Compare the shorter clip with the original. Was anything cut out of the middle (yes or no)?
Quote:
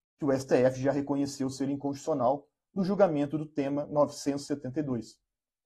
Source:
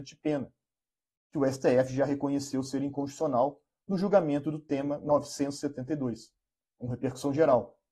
no